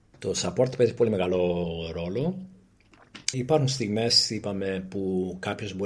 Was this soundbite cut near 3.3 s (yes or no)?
yes